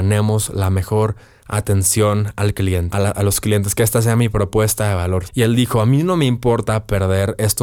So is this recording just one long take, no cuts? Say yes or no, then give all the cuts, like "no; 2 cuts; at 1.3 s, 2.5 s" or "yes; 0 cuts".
no; 2 cuts; at 2.9 s, 5.3 s